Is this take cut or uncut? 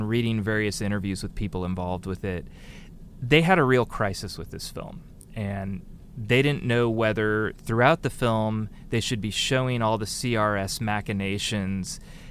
uncut